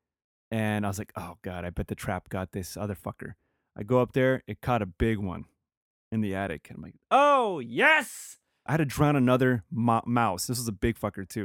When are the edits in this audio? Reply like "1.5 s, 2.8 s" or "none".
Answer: 8.7 s